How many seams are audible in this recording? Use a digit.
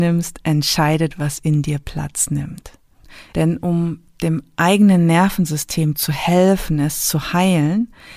1